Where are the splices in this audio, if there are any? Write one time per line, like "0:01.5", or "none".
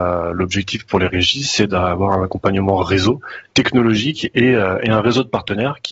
none